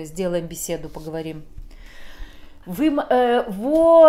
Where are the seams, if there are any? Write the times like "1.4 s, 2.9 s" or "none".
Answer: 2.6 s

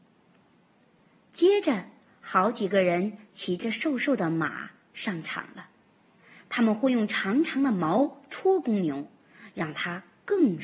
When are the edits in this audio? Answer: none

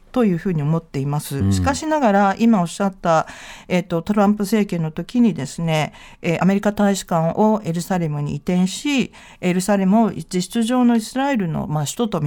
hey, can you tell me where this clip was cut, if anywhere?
none

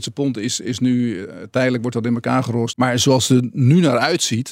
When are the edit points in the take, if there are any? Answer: 2.7 s

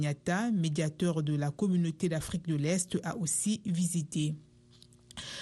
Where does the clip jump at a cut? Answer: none

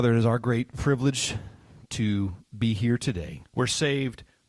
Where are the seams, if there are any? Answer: 3.4 s

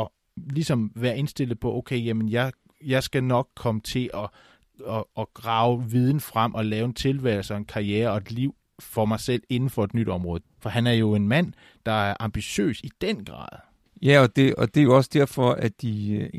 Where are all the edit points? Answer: 10.4 s

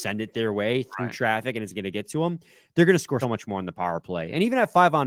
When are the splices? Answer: 3.2 s

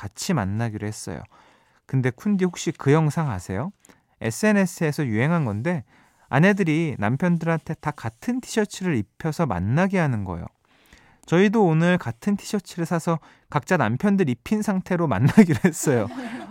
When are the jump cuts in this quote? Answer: none

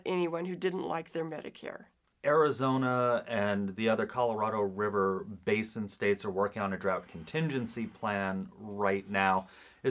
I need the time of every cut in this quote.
none

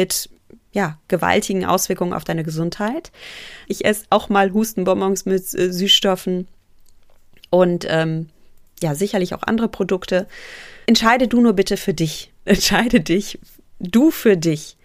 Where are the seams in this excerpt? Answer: 3.6 s, 10.8 s, 12.5 s

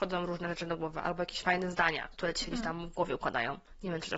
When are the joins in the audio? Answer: none

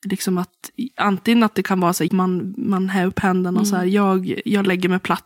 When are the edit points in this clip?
2.1 s

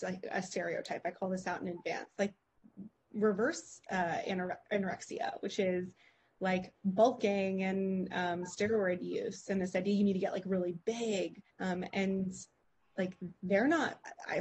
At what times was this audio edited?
11.5 s

